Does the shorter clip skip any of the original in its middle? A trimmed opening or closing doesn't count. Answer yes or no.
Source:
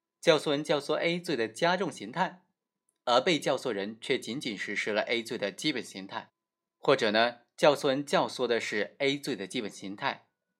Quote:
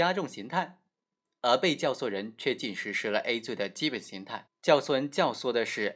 yes